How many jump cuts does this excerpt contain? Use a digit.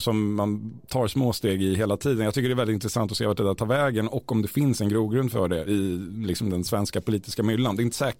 1